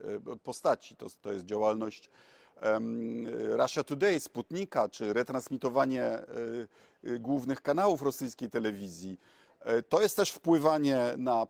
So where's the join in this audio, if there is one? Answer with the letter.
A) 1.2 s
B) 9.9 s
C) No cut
A